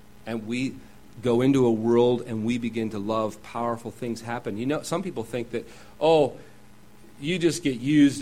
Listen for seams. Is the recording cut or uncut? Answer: uncut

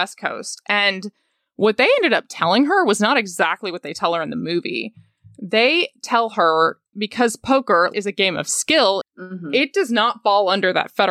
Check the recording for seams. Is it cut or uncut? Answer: cut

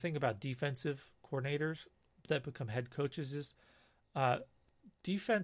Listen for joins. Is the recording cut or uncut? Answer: uncut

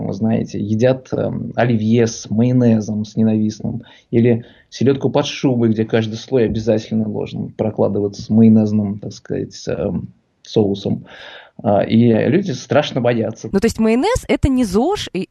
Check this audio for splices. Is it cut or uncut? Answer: cut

